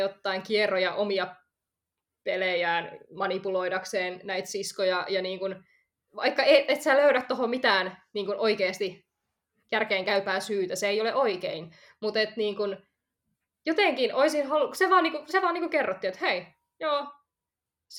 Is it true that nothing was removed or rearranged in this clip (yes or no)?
yes